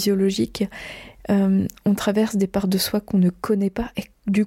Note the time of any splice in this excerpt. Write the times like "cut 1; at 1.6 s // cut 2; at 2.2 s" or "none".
none